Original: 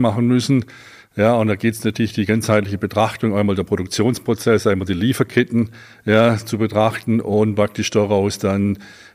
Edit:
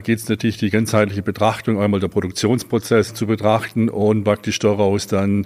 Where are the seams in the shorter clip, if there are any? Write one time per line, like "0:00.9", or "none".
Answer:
0:03.1